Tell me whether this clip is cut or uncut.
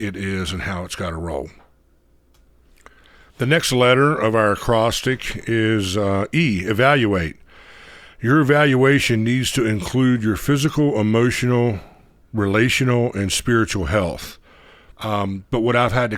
cut